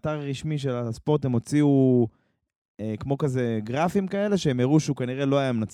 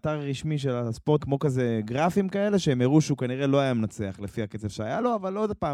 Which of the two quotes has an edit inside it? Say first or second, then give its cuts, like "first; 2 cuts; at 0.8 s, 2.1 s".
second; 1 cut; at 1.2 s